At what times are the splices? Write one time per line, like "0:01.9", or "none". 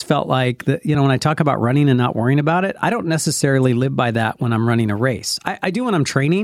none